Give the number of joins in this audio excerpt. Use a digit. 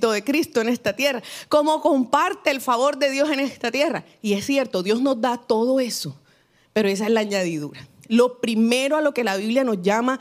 0